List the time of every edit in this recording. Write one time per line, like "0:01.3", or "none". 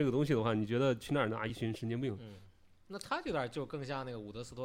none